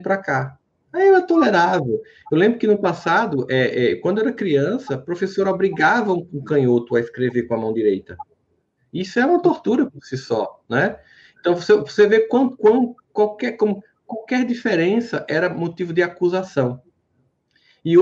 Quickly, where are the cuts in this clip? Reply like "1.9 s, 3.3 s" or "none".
none